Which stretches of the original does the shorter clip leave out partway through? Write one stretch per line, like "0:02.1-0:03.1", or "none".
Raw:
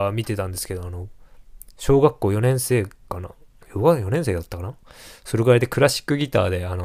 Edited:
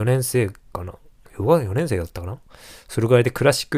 none